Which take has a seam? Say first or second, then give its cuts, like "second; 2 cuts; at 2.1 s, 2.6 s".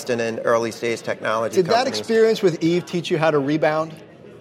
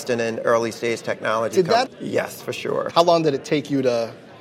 second; 2 cuts; at 1.9 s, 2.9 s